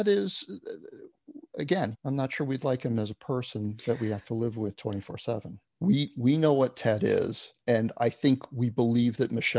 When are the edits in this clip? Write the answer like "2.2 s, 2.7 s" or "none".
1.9 s, 5.6 s, 7.6 s

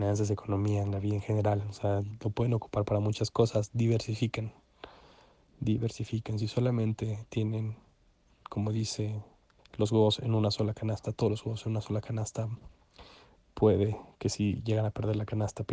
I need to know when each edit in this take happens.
9.6 s

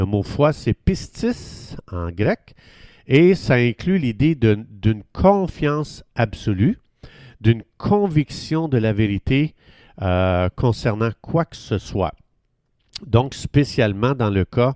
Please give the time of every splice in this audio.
none

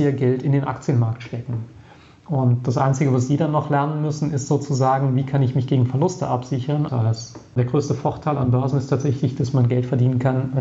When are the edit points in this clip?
6.9 s

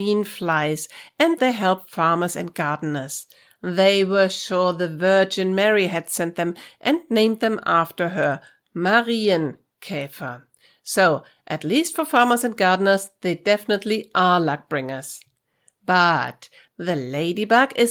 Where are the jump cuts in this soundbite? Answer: 1.4 s

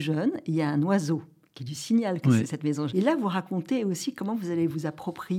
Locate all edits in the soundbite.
2.9 s

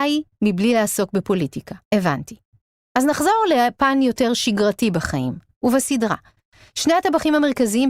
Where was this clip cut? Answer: 1.8 s

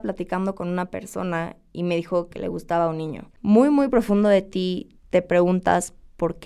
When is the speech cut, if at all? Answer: 3.3 s, 5.0 s

